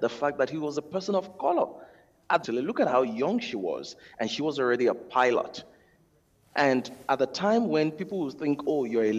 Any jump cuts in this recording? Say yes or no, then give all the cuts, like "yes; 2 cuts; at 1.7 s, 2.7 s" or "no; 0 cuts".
yes; 1 cut; at 2.4 s